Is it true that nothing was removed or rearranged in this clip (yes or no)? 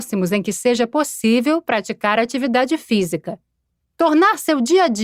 yes